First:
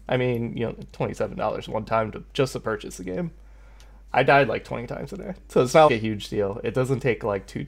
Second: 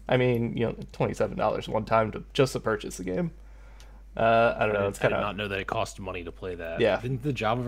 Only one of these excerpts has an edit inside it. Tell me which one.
first; 2 cuts; at 4.1 s, 5.9 s

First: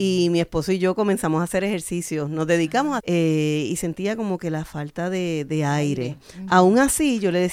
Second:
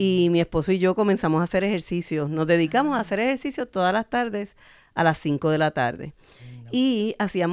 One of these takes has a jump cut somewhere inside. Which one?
first; 1 cut; at 3.0 s

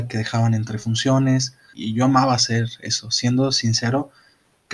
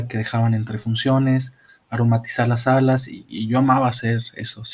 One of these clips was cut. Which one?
first; 1 cut; at 1.7 s

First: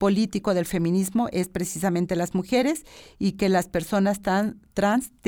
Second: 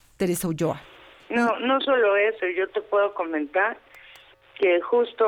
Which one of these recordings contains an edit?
second; 1 cut; at 1.2 s

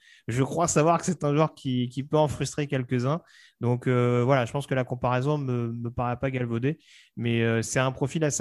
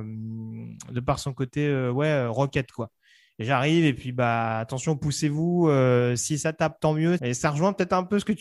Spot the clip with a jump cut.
second; 1 cut; at 7.2 s

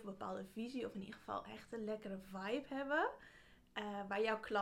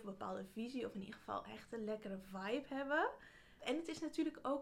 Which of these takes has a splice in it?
second; 1 cut; at 3.6 s

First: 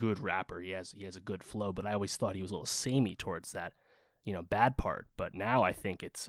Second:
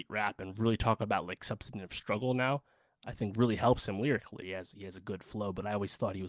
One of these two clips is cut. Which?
second; 1 cut; at 4.4 s

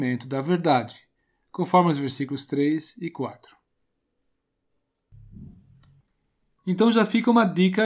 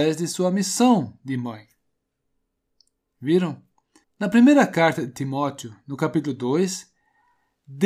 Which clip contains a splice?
second; 1 cut; at 4.0 s

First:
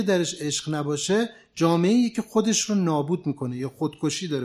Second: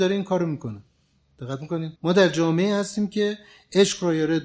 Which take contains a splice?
second; 1 cut; at 2.0 s

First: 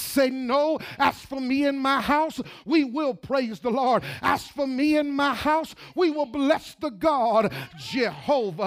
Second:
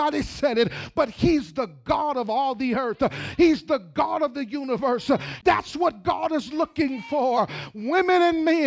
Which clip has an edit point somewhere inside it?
second; 1 cut; at 5.4 s

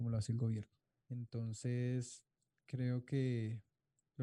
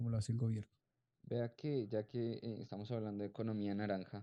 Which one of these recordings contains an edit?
first; 1 cut; at 1.0 s

